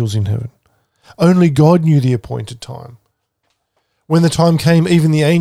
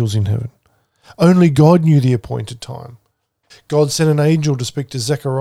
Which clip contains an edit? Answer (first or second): second